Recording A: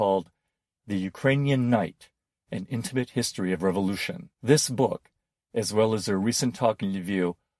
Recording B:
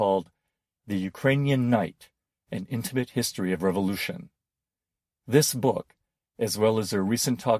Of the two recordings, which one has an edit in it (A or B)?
A